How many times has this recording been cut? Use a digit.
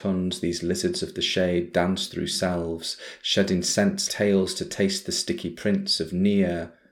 1